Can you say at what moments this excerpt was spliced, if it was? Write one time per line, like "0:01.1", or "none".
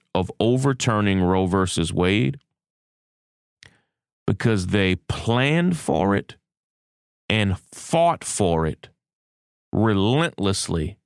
0:07.1